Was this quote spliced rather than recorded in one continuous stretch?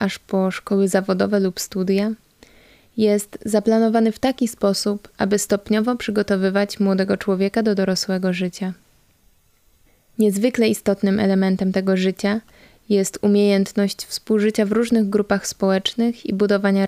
no; 0 cuts

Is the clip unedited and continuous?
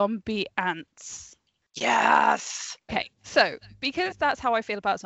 no; 1 cut; at 2.9 s

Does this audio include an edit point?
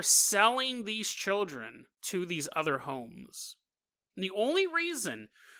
yes; 2 cuts; at 1.9 s, 4.1 s

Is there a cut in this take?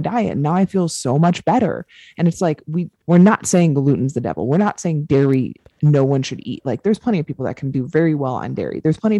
yes; 1 cut; at 3.0 s

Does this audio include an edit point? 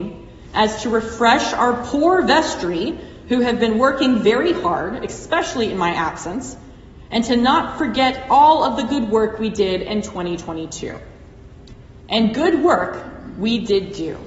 no; 0 cuts

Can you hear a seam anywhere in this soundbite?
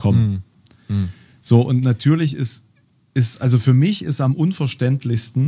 no; 0 cuts

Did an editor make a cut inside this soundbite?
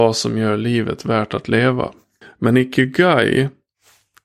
yes; 1 cut; at 2.2 s

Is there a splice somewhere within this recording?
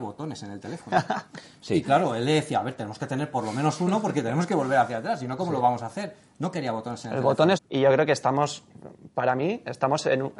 yes; 1 cut; at 7.5 s

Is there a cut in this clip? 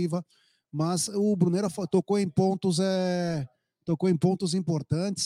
no; 0 cuts

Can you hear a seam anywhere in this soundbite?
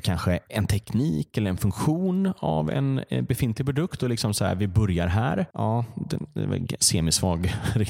no; 0 cuts

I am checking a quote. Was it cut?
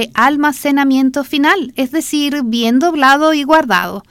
no; 0 cuts

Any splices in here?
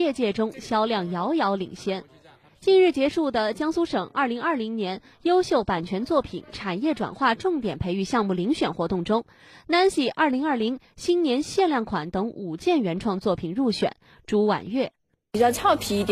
no; 0 cuts

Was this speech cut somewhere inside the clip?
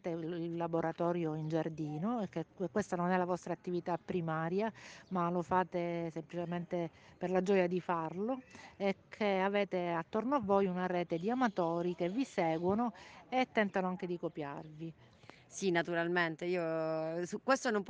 no; 0 cuts

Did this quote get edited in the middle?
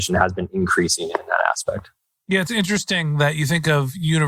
no; 0 cuts

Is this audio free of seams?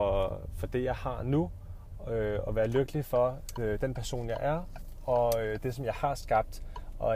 yes; 0 cuts

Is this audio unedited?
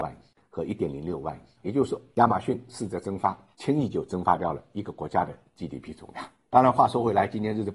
yes; 0 cuts

